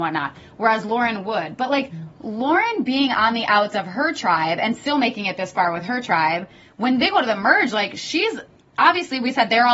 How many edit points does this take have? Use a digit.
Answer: 0